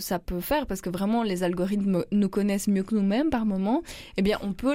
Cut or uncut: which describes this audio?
uncut